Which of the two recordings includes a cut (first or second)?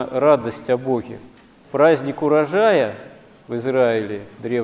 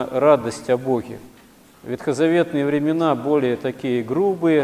first